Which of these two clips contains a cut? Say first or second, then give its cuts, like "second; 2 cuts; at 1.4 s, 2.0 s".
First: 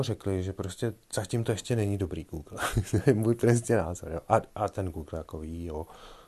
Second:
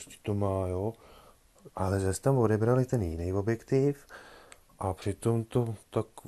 second; 1 cut; at 1.7 s